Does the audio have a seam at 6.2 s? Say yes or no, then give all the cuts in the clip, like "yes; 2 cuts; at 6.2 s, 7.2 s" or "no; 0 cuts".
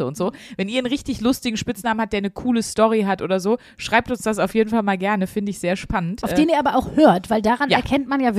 no; 0 cuts